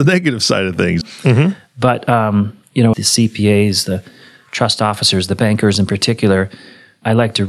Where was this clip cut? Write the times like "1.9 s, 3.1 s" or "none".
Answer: 1.0 s, 2.9 s